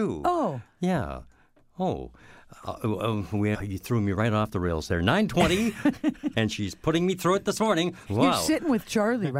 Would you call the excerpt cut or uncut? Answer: cut